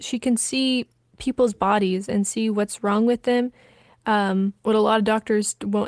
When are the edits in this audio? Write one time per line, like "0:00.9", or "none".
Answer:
none